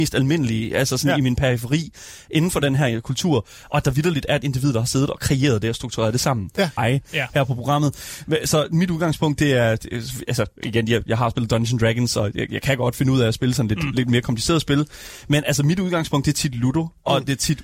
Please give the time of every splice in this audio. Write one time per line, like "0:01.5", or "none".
0:06.8